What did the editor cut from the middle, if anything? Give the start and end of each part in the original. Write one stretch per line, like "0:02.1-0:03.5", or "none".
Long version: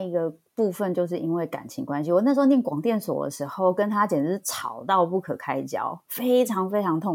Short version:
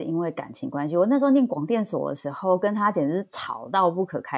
none